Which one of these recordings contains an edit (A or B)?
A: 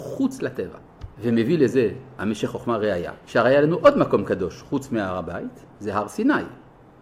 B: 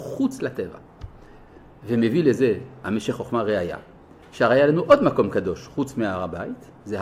A